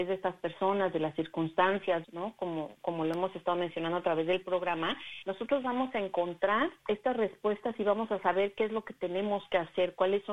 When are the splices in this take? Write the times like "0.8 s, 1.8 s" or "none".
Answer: 2.0 s, 6.8 s

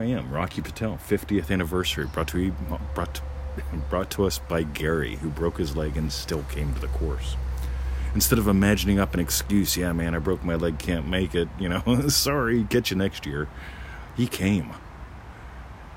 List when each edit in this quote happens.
none

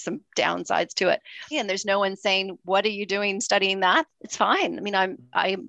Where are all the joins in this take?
1.5 s, 4.1 s

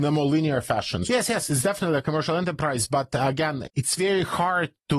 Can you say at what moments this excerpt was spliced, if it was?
1.1 s, 3.6 s

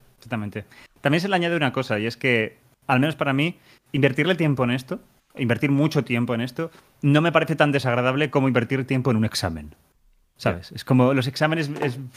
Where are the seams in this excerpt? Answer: none

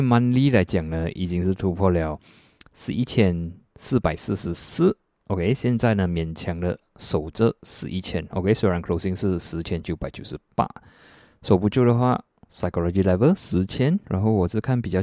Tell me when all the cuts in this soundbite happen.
none

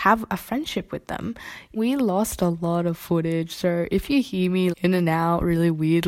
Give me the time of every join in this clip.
1.8 s, 4.7 s

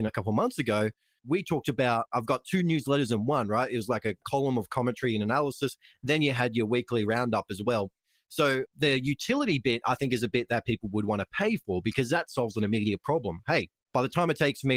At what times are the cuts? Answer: 2.1 s

